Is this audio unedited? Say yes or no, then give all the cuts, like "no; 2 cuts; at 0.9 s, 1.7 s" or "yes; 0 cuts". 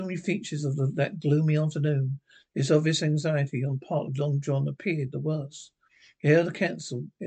yes; 0 cuts